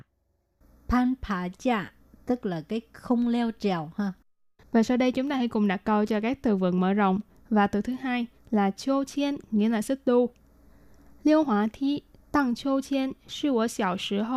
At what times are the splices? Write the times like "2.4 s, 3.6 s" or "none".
7.4 s